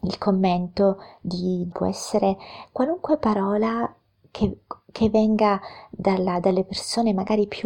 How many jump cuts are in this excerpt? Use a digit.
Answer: 1